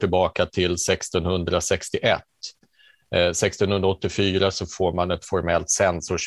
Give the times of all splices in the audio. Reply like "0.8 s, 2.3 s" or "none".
none